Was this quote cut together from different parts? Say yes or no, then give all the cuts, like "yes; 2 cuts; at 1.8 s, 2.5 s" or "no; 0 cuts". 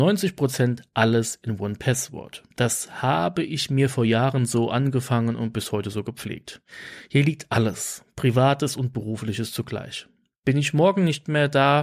yes; 1 cut; at 2.5 s